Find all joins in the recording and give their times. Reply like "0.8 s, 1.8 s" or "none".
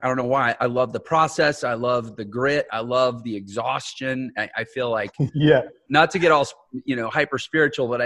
2.7 s